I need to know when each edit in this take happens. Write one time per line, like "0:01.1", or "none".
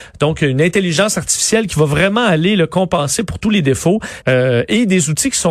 0:04.2